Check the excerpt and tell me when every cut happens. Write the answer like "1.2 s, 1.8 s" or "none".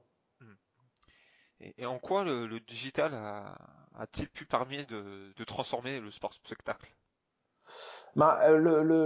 none